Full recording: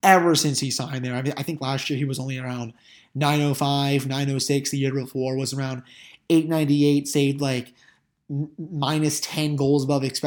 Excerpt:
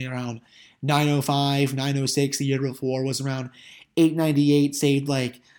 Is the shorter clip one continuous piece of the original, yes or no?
yes